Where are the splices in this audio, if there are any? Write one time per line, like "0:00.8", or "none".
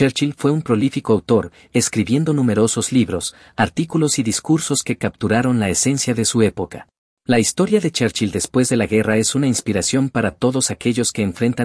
0:07.1